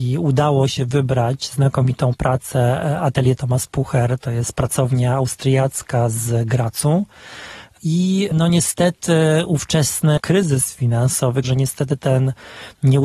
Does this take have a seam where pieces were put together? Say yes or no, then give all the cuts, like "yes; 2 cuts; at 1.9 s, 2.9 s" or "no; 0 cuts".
yes; 1 cut; at 11.4 s